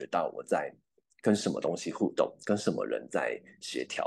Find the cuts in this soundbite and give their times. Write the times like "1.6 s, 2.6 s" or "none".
none